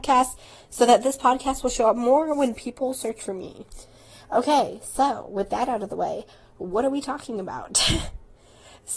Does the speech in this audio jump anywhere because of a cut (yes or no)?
no